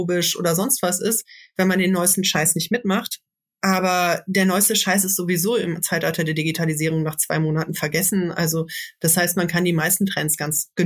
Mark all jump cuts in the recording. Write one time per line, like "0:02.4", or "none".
none